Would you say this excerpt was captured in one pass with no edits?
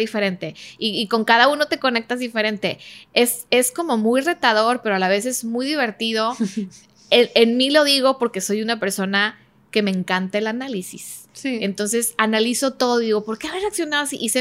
yes; 0 cuts

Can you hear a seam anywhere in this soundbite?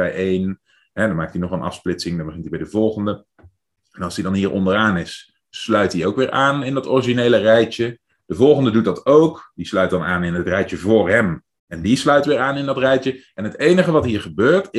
no; 0 cuts

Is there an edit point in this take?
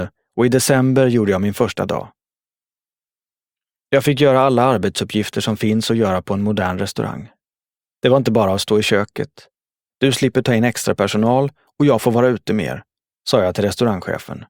yes; 1 cut; at 9.9 s

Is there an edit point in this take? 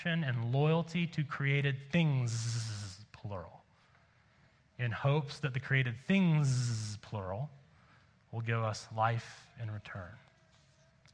no; 0 cuts

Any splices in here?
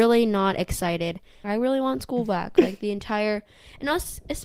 yes; 1 cut; at 1.4 s

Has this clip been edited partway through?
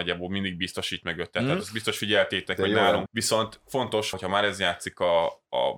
yes; 2 cuts; at 3.1 s, 4.1 s

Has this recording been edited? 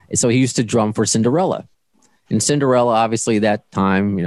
no; 0 cuts

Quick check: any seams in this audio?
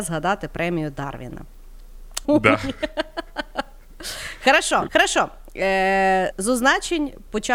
yes; 3 cuts; at 2.2 s, 4.9 s, 6.3 s

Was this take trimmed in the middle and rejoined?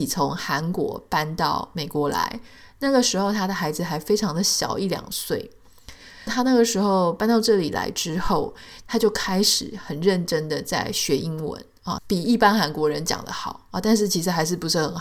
yes; 2 cuts; at 6.3 s, 12.0 s

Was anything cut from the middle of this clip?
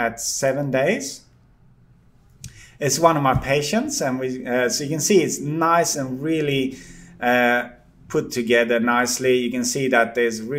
no; 0 cuts

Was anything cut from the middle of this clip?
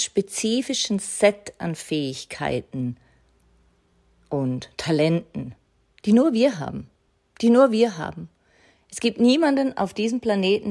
no; 0 cuts

